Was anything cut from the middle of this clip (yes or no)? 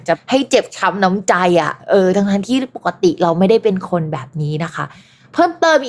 no